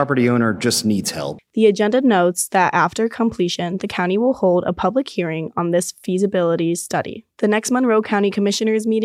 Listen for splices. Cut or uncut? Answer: cut